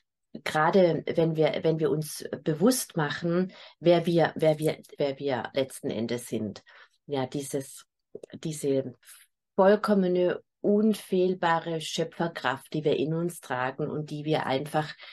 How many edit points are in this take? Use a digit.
1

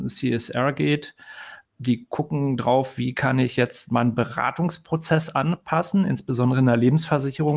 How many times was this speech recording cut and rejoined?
0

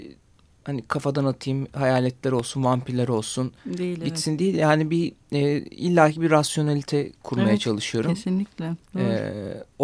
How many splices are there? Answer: 0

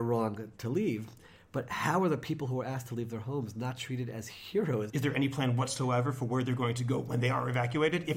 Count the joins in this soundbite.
1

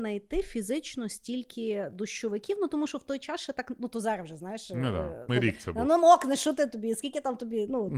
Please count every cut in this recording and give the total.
1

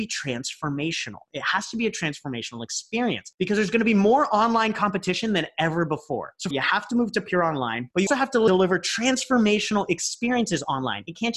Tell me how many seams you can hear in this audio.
2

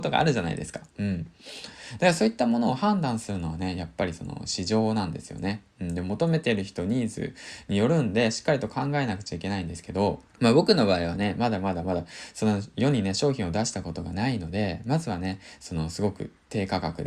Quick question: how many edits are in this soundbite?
1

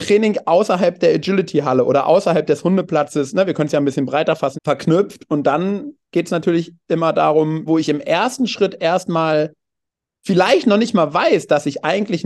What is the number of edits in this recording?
2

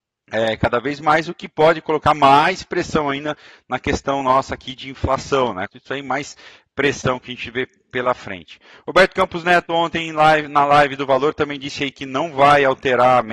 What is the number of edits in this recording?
1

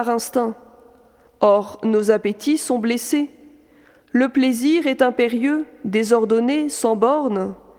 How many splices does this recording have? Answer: 0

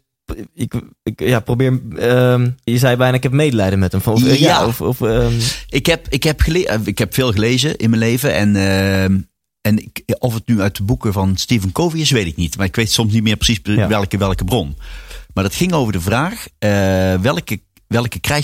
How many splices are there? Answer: 1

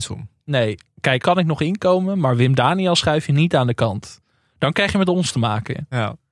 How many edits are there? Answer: 1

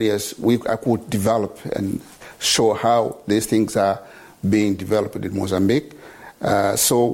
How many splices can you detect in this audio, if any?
0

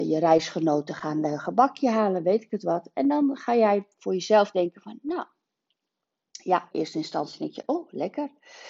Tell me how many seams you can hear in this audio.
1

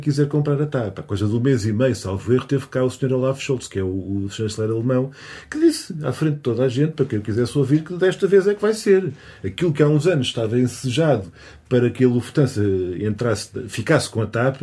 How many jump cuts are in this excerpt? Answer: 0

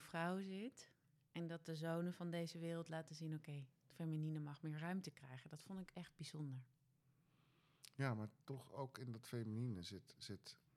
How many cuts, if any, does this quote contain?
0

